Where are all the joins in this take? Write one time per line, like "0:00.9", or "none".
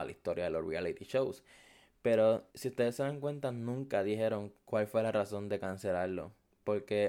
0:02.5